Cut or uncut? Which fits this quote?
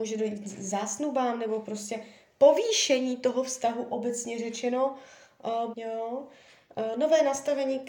cut